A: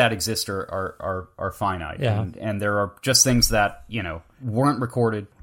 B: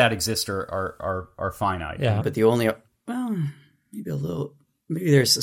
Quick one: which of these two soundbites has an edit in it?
B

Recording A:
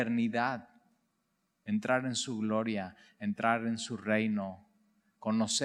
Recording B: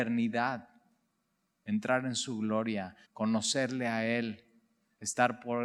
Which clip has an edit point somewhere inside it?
B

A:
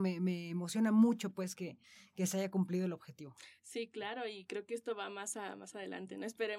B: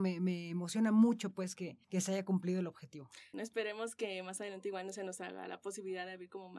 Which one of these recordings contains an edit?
B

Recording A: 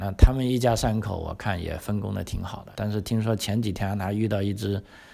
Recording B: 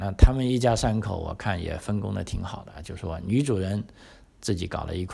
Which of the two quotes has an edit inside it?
A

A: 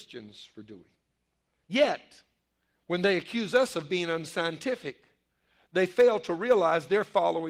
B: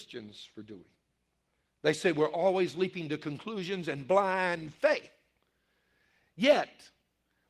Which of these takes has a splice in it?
A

